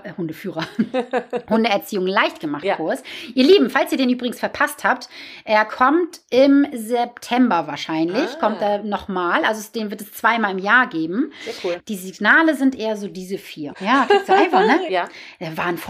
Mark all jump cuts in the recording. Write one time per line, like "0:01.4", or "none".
0:11.8
0:13.7
0:14.9